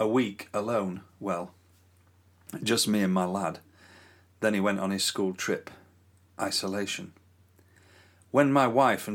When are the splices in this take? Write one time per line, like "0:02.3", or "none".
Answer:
none